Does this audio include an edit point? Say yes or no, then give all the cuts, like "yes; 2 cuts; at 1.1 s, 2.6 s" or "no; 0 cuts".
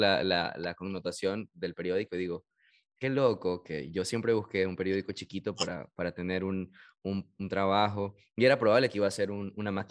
no; 0 cuts